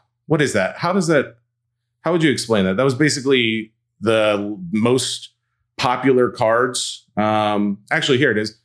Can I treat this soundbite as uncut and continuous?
yes; 0 cuts

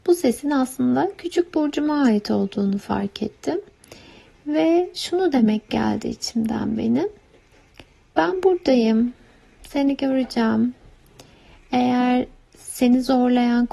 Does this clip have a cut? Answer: no; 0 cuts

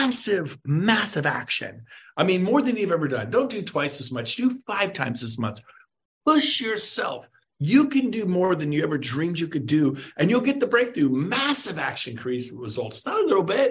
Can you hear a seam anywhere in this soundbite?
no; 0 cuts

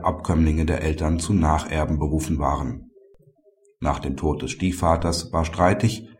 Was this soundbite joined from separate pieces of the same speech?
yes; 1 cut; at 3.7 s

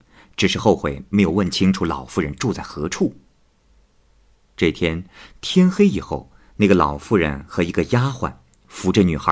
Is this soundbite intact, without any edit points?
yes; 0 cuts

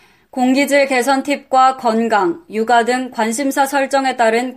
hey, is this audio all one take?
no; 1 cut; at 2.5 s

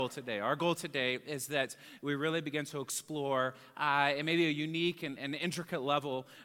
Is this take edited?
yes; 1 cut; at 5.2 s

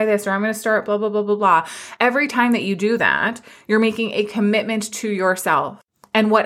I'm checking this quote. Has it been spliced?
no; 0 cuts

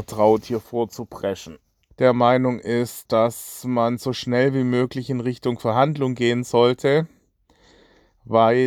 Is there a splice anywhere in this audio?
yes; 2 cuts; at 1.9 s, 3.0 s

